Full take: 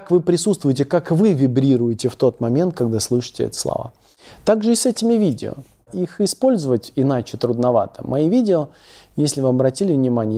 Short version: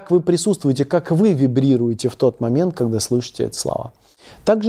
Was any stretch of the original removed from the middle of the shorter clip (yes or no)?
no